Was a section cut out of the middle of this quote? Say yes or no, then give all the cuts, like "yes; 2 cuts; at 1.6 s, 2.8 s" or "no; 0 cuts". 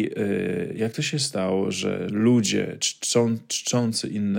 yes; 1 cut; at 2.1 s